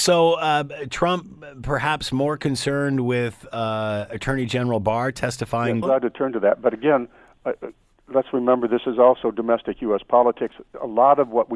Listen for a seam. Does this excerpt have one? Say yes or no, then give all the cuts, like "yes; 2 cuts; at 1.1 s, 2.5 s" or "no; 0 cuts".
yes; 1 cut; at 5.8 s